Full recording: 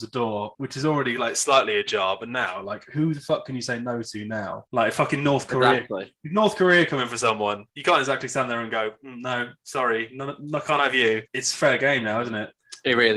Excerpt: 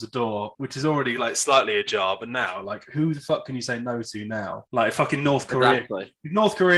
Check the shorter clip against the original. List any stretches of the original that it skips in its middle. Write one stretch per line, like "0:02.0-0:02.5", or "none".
none